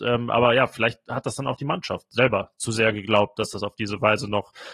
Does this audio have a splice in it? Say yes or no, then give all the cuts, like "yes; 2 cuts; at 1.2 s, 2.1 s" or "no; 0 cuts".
no; 0 cuts